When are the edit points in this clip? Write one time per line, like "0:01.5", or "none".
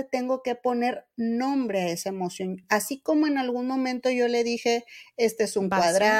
none

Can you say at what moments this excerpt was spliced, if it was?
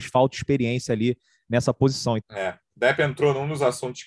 0:02.2

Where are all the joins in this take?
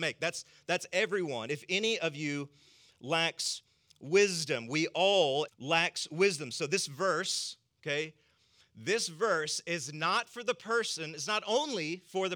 0:05.5

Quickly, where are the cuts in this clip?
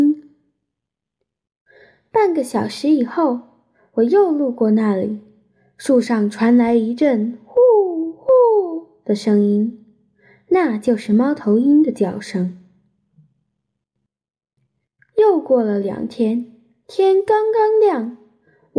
none

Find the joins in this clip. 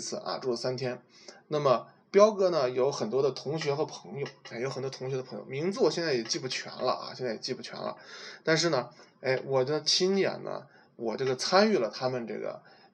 none

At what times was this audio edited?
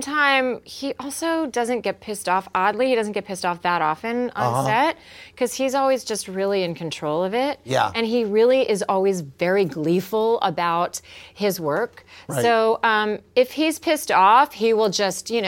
none

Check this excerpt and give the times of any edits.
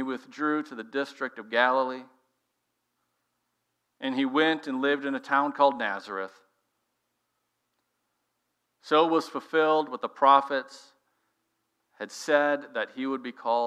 none

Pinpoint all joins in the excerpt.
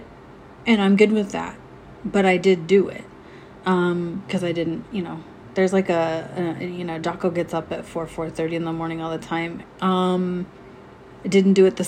0:04.8
0:09.6

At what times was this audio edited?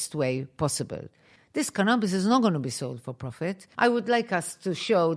0:03.7

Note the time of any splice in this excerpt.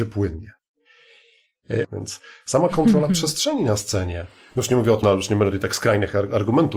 0:01.8
0:05.0

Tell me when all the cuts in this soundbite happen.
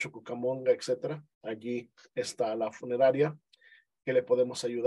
0:01.3

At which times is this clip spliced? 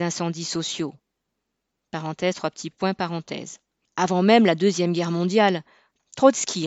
0:03.8

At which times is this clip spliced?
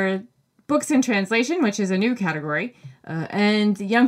none

